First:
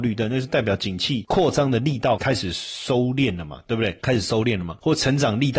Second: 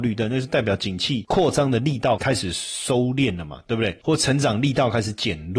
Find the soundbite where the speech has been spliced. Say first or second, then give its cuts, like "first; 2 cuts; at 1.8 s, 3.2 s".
second; 1 cut; at 4.0 s